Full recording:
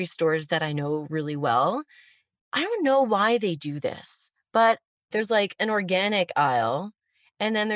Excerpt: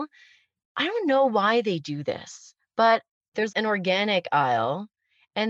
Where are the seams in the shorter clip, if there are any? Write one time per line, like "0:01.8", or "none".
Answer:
0:03.5